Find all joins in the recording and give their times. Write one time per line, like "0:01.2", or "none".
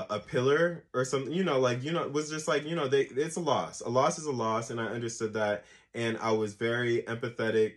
none

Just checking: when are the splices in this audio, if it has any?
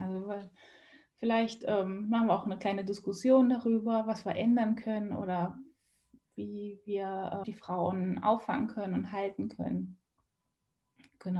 0:07.4

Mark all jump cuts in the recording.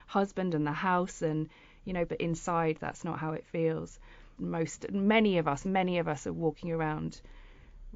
0:02.1
0:04.4
0:05.6

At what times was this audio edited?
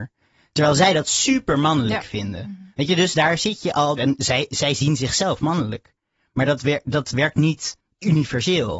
0:04.0

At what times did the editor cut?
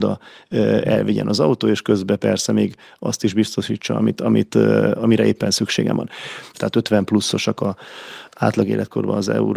0:06.5

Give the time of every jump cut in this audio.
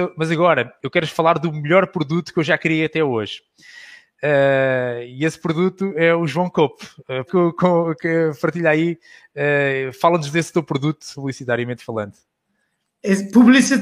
0:07.3
0:11.1

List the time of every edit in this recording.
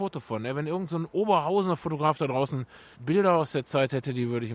0:02.9

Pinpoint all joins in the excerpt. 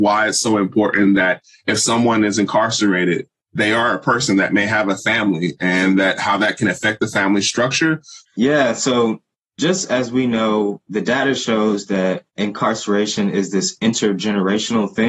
0:08.2
0:12.3

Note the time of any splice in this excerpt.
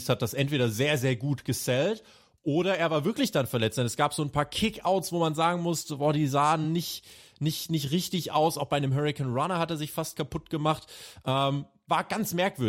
none

